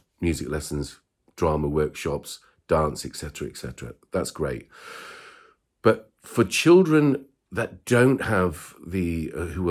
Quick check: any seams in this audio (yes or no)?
no